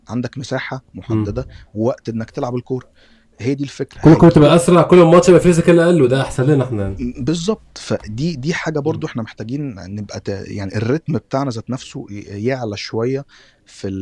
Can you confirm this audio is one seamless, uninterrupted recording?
yes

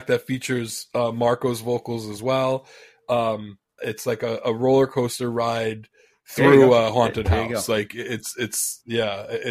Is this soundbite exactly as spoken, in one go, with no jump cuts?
no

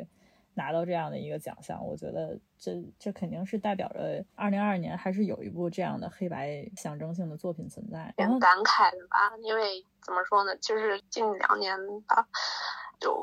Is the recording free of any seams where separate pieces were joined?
no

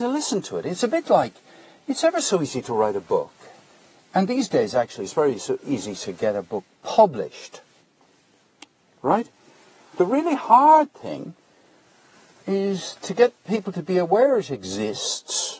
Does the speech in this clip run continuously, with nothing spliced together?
yes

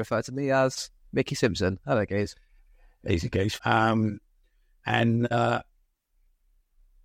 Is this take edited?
yes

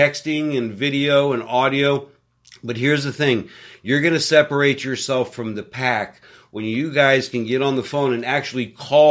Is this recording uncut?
yes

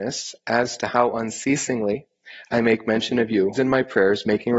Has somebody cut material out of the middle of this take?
yes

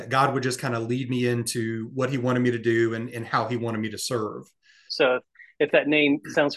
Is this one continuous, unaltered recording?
no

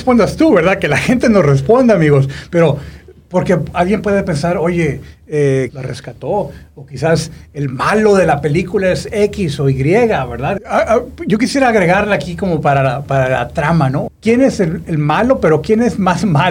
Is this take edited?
yes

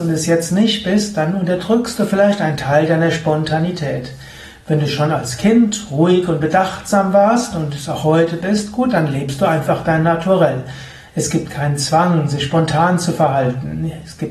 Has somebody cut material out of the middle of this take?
no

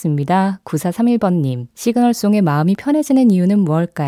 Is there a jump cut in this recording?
yes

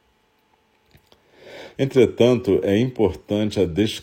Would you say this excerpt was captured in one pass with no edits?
no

